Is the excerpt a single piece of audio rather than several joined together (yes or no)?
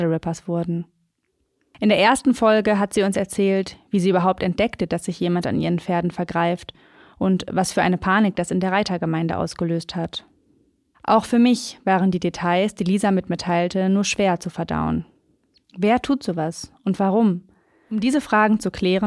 yes